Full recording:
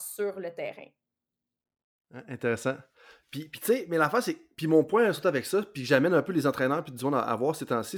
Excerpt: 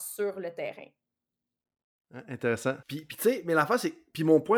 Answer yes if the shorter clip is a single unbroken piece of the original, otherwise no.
no